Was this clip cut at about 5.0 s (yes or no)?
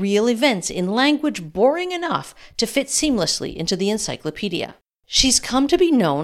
yes